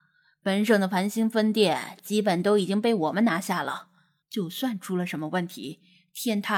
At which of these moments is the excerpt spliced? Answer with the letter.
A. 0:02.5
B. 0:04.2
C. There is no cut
B